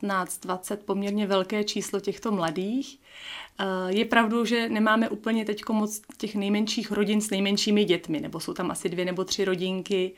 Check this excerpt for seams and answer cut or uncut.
uncut